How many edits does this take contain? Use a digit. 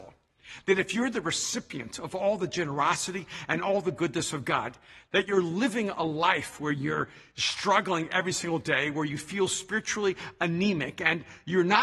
0